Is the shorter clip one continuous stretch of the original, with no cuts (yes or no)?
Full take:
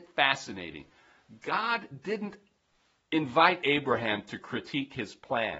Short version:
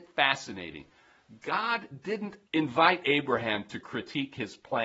no